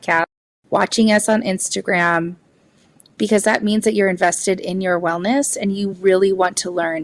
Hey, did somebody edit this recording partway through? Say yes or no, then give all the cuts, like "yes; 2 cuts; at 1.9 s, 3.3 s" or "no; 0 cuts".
no; 0 cuts